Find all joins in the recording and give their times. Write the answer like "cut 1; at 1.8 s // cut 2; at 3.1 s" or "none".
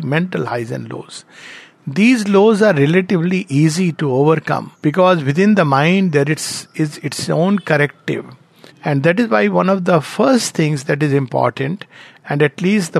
cut 1; at 4.7 s // cut 2; at 8.7 s